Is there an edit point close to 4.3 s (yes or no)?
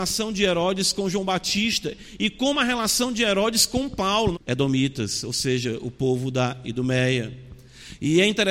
yes